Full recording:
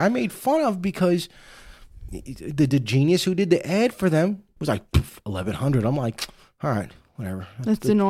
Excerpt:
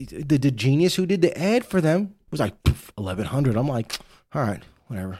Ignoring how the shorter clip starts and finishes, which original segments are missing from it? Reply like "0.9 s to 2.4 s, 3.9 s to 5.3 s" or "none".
none